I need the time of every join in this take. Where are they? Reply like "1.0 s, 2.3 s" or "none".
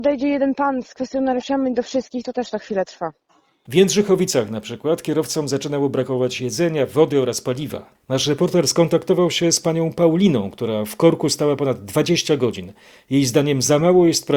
3.7 s